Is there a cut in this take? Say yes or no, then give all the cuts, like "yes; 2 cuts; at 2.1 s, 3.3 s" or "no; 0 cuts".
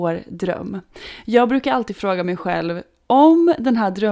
no; 0 cuts